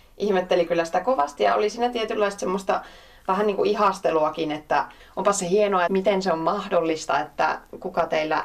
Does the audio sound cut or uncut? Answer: cut